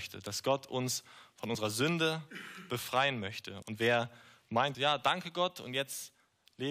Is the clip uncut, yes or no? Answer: no